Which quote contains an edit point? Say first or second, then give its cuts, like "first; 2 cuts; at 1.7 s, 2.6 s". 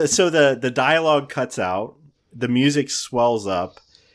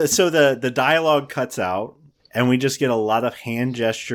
second; 1 cut; at 2.2 s